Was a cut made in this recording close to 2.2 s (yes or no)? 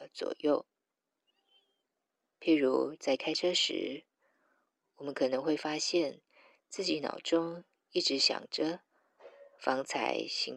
no